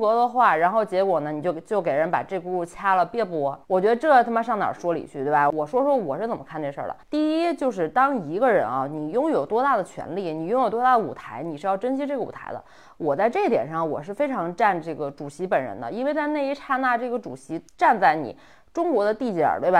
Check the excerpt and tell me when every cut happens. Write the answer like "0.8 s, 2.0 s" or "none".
3.6 s, 7.0 s, 17.7 s